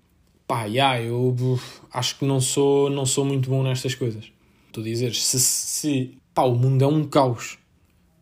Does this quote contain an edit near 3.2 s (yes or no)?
no